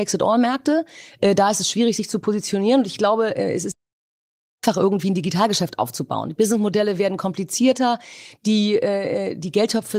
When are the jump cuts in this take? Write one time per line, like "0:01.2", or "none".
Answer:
none